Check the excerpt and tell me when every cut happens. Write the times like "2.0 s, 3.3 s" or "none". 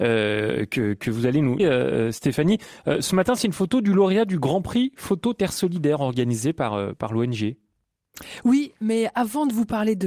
1.6 s